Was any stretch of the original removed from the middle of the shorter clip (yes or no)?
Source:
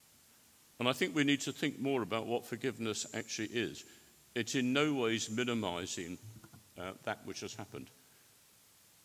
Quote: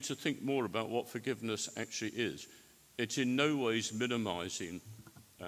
no